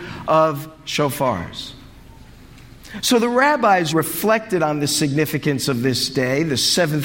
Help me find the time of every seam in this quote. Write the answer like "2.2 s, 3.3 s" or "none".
3.9 s

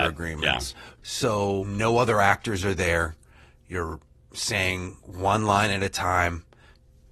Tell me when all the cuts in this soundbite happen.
1.0 s

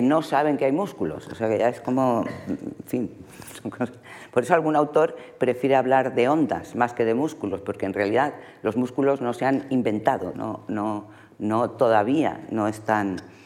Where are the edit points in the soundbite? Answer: 10.3 s

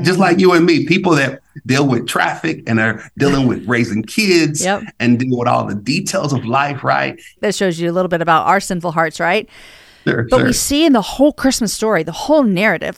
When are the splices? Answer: 7.4 s

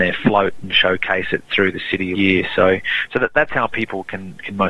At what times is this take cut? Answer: 2.1 s

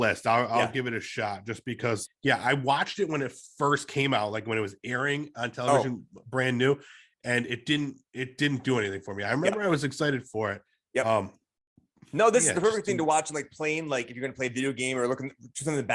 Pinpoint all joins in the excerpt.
2.0 s

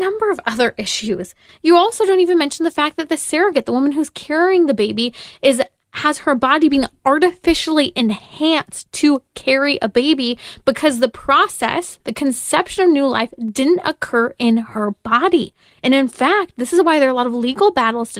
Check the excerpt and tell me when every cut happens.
12.0 s, 15.8 s

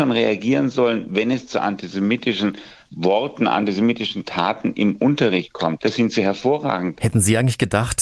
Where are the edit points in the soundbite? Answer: 5.8 s, 7.0 s

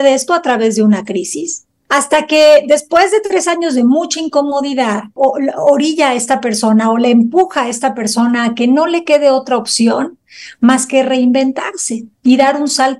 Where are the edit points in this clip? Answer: 1.9 s, 5.2 s

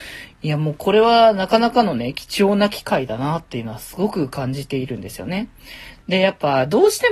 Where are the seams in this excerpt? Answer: 6.0 s

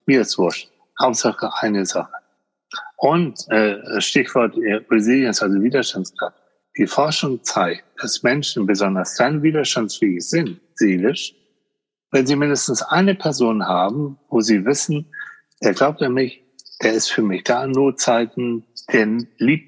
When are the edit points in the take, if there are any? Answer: none

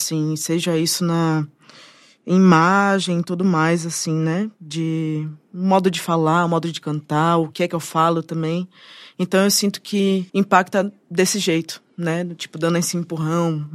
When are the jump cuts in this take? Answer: 10.3 s

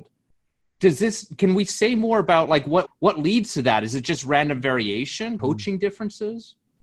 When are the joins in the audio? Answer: 2.9 s, 5.4 s

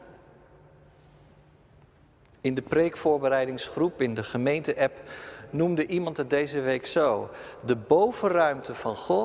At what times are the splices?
none

